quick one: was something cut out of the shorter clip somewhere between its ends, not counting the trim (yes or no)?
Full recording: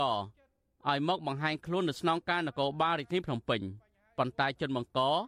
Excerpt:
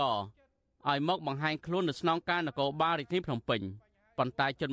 no